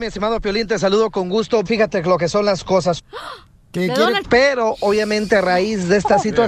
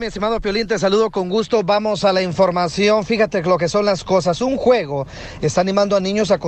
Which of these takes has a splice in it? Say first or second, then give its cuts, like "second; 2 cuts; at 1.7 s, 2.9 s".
first; 3 cuts; at 1.7 s, 3.0 s, 4.2 s